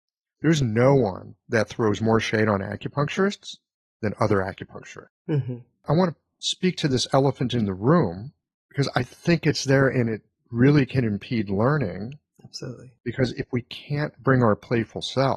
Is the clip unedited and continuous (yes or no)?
yes